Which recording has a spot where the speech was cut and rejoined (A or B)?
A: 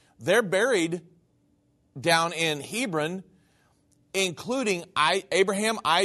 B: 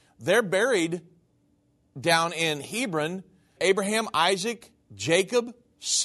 B